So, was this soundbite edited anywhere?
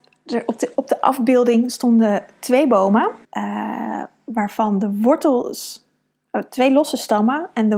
yes; 1 cut; at 3.2 s

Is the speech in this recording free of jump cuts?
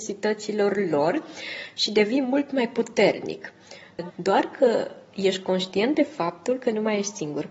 no; 1 cut; at 4.1 s

